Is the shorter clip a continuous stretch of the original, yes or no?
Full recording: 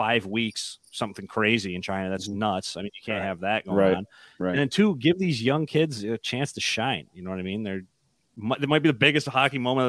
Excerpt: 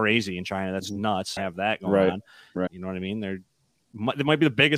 no